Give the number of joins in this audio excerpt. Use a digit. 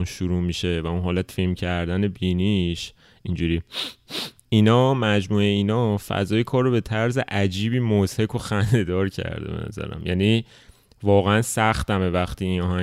1